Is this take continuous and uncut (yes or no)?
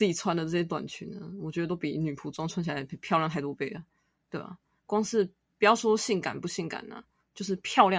yes